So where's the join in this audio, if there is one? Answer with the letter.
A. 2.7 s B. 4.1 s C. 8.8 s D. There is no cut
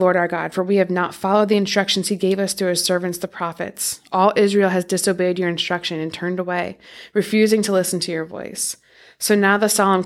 D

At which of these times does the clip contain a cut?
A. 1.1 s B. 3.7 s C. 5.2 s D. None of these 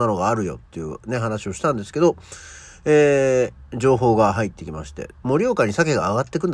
D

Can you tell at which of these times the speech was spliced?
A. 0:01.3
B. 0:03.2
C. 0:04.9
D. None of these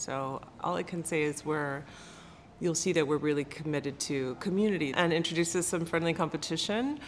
C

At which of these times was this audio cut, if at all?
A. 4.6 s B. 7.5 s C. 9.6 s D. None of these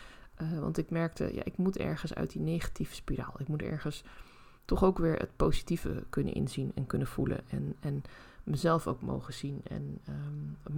A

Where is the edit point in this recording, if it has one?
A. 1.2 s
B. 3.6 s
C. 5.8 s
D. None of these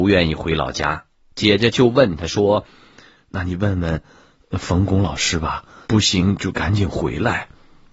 C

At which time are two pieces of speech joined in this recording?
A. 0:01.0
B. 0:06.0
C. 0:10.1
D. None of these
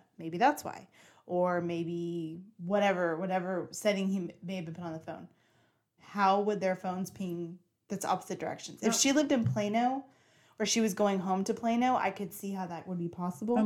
B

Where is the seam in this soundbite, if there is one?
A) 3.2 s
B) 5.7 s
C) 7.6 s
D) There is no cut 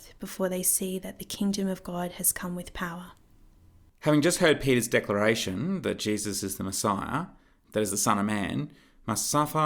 C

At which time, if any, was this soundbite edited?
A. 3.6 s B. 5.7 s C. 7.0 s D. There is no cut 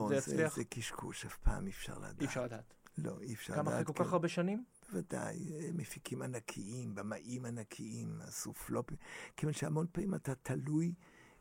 D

